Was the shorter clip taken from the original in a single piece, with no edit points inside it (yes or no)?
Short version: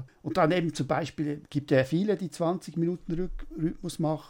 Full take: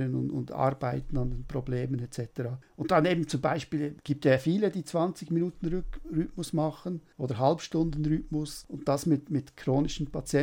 yes